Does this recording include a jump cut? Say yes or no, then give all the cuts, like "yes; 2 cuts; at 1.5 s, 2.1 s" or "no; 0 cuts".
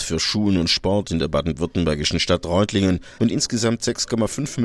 yes; 1 cut; at 3.2 s